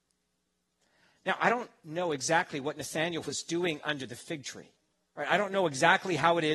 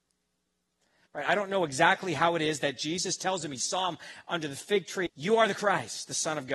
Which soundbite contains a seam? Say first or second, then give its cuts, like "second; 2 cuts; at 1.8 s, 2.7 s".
second; 2 cuts; at 1.1 s, 5.1 s